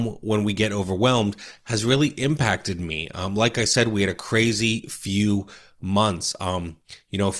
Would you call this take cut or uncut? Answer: uncut